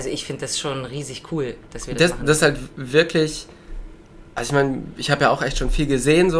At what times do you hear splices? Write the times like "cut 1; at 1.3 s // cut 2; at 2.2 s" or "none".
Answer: none